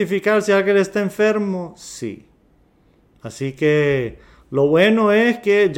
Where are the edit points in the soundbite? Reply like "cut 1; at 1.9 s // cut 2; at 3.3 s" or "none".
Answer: none

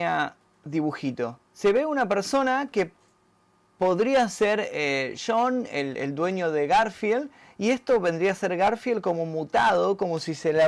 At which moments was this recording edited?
cut 1; at 1.4 s

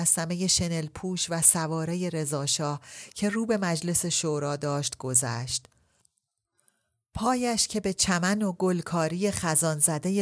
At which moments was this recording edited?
none

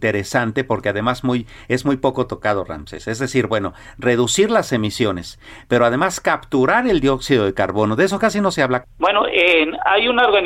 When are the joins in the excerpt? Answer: cut 1; at 8.8 s

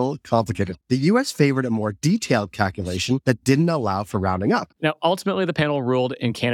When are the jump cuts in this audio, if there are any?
cut 1; at 4.7 s

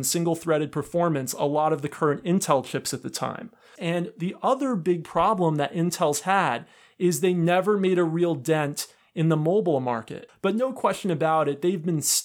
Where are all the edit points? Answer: cut 1; at 3.8 s // cut 2; at 10.3 s

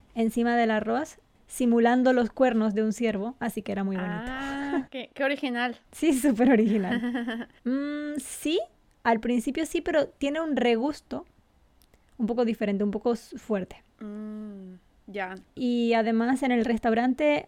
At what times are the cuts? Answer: cut 1; at 5.8 s // cut 2; at 7.6 s // cut 3; at 15.5 s

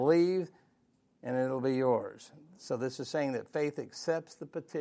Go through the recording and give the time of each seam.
none

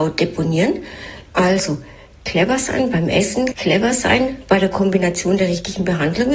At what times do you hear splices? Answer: cut 1; at 1.3 s // cut 2; at 3.5 s

